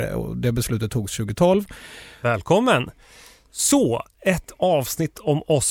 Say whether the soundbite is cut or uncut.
cut